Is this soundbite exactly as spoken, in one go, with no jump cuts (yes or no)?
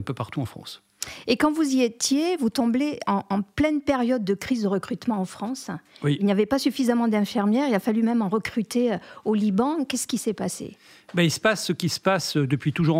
yes